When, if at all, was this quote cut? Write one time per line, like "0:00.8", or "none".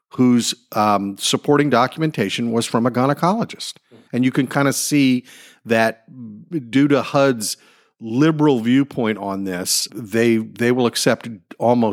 0:04.1
0:09.9